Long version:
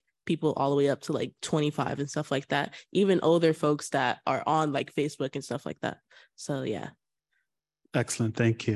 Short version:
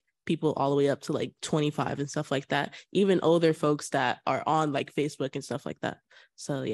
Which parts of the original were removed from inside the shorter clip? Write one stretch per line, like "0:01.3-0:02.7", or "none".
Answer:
none